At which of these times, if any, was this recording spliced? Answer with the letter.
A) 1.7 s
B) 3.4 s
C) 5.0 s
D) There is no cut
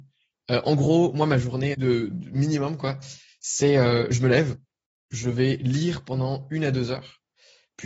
A